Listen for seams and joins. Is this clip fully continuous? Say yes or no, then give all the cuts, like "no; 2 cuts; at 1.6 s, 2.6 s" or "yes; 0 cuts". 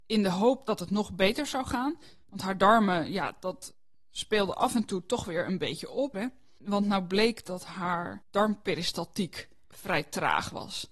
no; 1 cut; at 6.1 s